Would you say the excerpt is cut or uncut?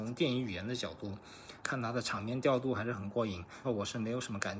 cut